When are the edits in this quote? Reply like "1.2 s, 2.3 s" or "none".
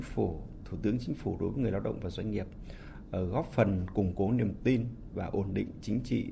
none